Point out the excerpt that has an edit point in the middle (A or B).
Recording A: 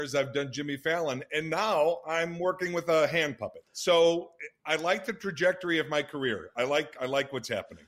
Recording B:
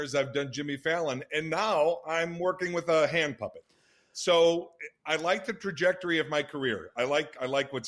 A